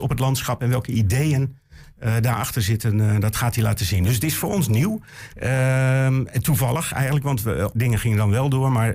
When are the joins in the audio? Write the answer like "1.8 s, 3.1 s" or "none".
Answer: 5.3 s, 7.7 s